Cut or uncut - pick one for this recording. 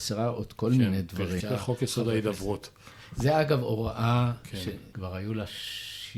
cut